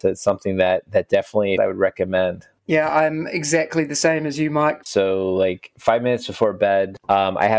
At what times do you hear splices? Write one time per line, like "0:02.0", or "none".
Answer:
0:01.6
0:04.8